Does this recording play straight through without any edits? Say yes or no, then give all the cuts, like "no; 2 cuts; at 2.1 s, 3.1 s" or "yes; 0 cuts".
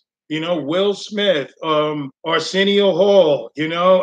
no; 1 cut; at 2.2 s